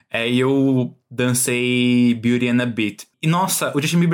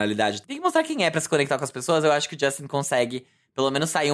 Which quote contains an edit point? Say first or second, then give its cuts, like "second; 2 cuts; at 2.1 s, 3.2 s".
first; 1 cut; at 3.1 s